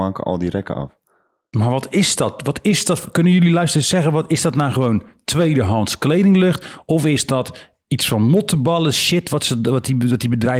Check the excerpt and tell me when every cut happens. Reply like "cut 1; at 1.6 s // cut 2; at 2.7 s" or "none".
none